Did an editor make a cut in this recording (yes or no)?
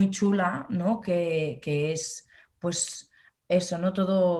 no